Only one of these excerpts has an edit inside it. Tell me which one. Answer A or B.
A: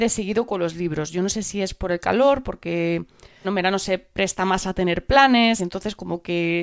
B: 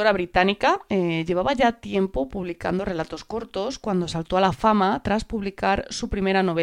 A